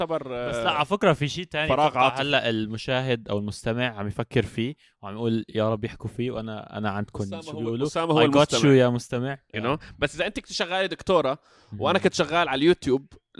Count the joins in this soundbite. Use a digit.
1